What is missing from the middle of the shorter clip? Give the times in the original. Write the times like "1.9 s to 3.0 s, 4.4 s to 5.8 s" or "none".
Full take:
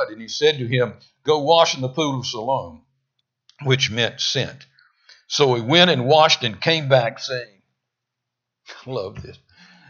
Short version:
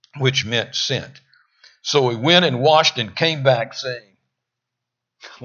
none